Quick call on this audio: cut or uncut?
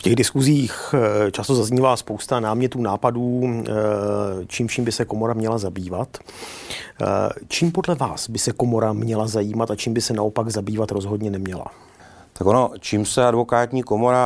uncut